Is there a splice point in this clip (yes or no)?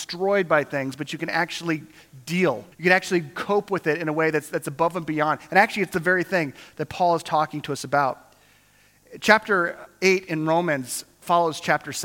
yes